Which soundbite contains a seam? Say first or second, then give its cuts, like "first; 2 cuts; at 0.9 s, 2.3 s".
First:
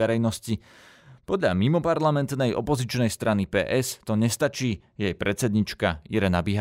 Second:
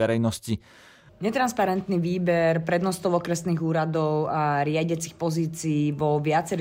second; 1 cut; at 1.1 s